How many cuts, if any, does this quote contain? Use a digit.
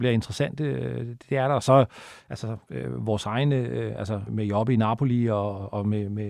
1